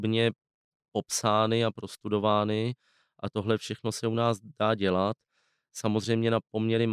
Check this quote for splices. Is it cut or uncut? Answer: uncut